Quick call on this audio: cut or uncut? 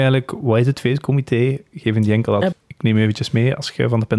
cut